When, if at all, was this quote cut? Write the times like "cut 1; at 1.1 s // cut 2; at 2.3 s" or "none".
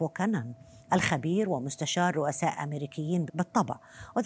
cut 1; at 3.3 s